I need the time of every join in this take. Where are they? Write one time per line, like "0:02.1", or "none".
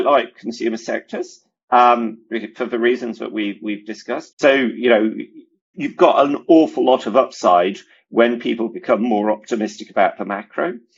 0:04.3
0:05.7